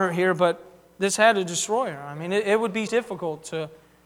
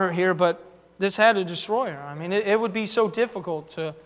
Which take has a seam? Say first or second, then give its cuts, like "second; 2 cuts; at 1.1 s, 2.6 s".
first; 1 cut; at 2.9 s